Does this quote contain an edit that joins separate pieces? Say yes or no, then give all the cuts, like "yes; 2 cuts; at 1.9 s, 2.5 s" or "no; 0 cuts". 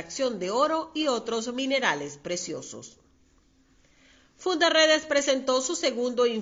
no; 0 cuts